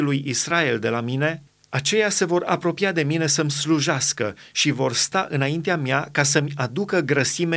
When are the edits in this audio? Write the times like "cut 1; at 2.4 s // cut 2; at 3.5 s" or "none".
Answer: none

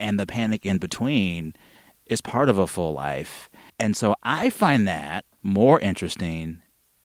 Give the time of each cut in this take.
cut 1; at 3.7 s // cut 2; at 5.3 s

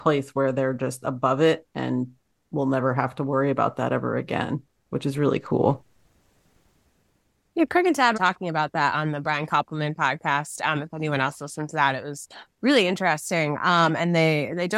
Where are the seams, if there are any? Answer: cut 1; at 8.1 s

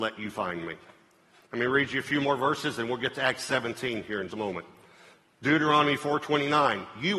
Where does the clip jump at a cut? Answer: cut 1; at 4.3 s

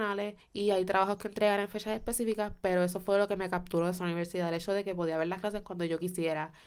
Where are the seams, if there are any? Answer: none

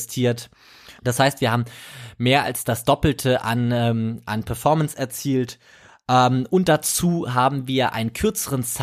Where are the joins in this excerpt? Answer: cut 1; at 1.0 s

